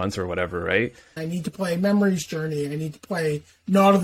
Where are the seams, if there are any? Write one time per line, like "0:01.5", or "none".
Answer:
0:01.2

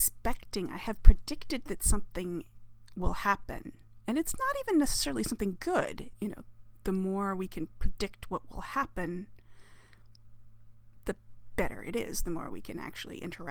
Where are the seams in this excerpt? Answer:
0:06.1

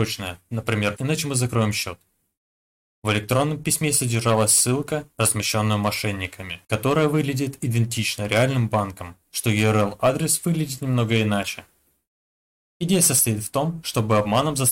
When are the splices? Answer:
0:01.0
0:05.1
0:09.2

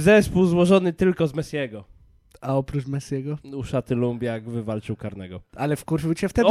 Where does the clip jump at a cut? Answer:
none

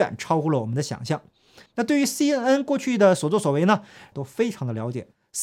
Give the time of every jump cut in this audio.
0:01.7
0:04.1

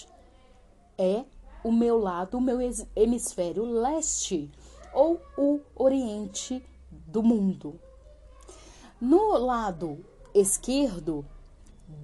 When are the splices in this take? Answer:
none

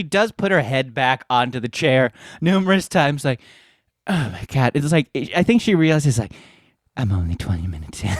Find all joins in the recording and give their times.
none

